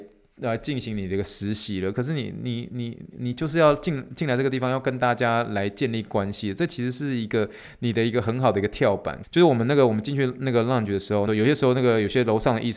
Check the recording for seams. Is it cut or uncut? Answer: cut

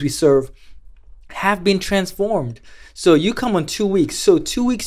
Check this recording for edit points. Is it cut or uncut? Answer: uncut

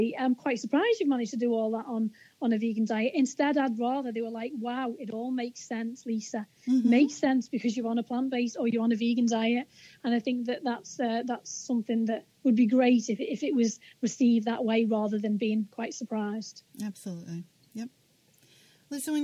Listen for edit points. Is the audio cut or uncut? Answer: uncut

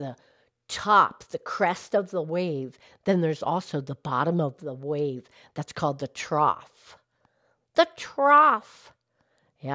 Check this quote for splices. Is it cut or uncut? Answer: uncut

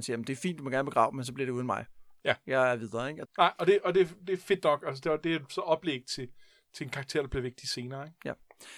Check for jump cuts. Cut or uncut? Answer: cut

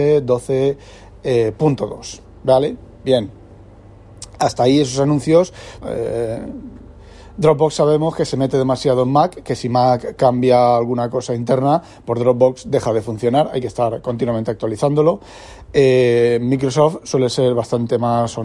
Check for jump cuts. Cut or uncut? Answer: cut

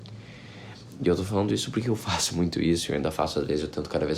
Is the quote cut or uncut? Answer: uncut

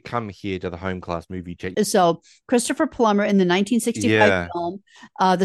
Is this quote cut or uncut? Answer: cut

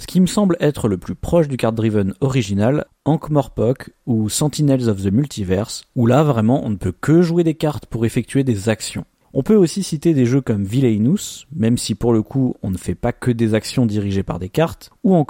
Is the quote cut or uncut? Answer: cut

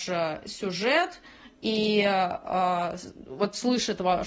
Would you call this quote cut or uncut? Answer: uncut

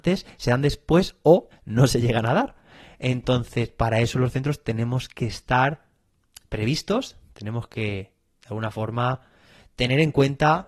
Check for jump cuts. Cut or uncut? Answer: cut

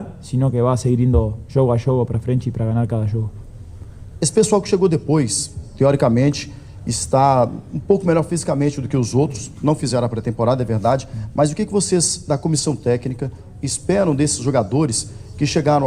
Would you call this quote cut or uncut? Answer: cut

